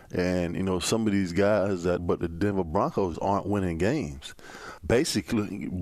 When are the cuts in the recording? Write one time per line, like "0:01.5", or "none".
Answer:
0:02.0
0:03.1
0:04.8